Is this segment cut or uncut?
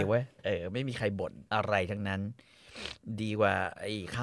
cut